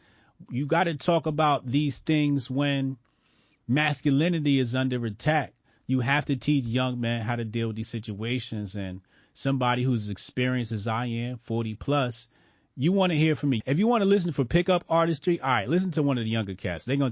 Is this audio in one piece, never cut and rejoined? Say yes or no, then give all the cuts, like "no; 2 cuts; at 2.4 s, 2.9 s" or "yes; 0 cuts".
no; 1 cut; at 13.6 s